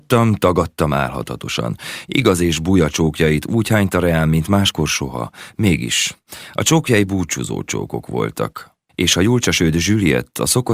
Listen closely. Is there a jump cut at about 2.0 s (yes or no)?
yes